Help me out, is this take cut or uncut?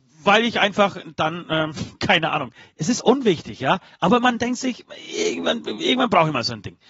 uncut